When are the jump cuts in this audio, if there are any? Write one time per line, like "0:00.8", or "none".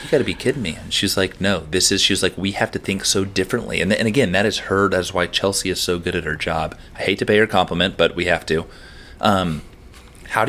none